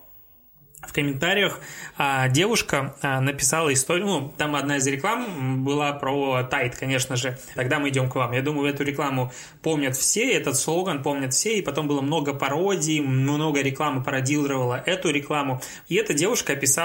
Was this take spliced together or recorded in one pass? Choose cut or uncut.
cut